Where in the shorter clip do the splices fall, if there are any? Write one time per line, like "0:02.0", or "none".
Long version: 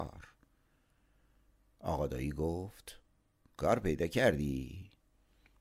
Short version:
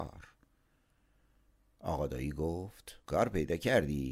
0:03.0

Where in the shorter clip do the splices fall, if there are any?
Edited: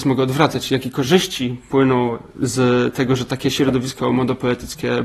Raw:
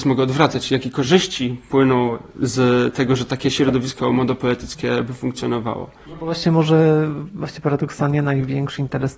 none

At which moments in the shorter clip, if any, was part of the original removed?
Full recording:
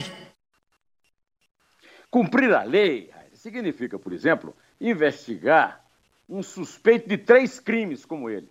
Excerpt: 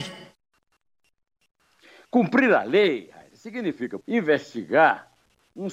0:04.0

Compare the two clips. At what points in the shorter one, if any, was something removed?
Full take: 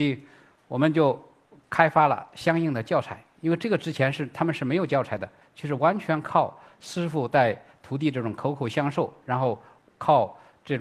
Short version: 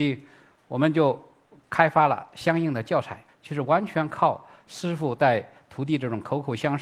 0:03.3

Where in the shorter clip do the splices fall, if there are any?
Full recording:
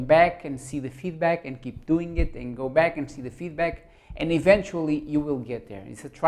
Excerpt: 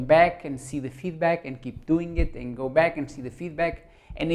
none

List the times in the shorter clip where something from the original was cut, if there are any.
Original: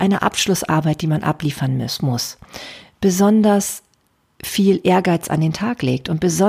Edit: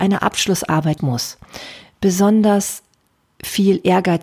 0:01.0

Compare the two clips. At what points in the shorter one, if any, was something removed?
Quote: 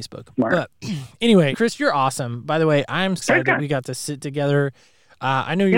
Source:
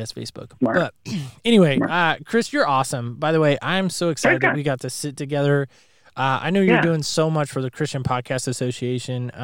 0:01.5
0:03.2

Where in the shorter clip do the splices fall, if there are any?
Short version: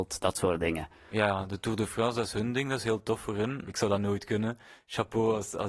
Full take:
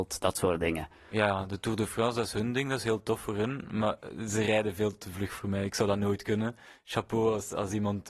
0:03.7

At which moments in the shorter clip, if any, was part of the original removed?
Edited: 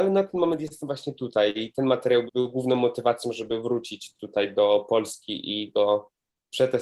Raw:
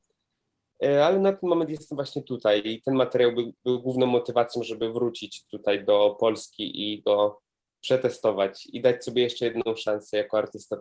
0:02.3

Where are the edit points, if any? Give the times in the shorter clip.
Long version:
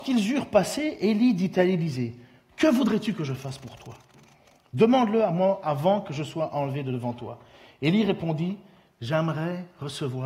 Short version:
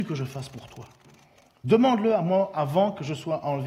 none

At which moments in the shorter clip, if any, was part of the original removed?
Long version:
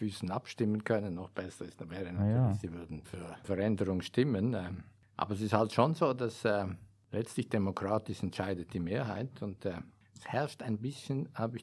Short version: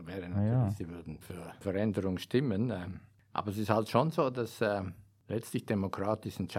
none

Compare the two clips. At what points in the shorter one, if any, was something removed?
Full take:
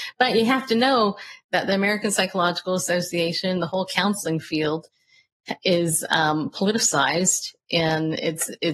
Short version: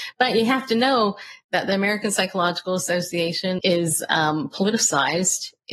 0:03.6

